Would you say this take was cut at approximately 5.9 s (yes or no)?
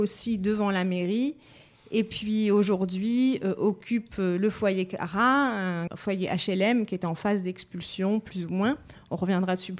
yes